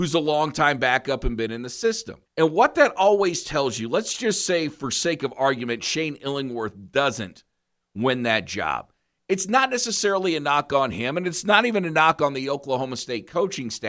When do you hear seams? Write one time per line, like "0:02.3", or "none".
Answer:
0:02.3

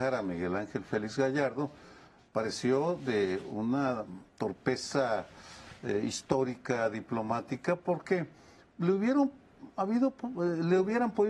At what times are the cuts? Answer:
none

